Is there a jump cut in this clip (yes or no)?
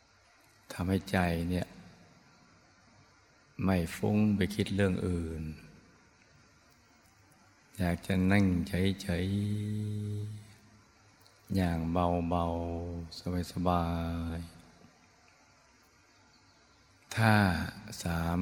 no